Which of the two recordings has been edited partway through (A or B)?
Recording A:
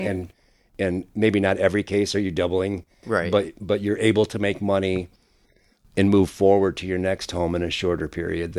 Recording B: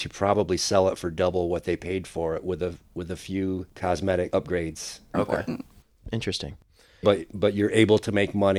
B